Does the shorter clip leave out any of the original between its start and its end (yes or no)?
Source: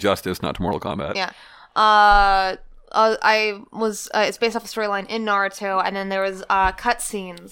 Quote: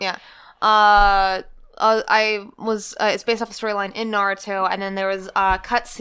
no